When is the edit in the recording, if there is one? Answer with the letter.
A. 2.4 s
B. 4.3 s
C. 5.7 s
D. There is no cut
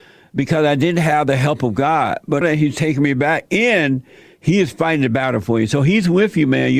A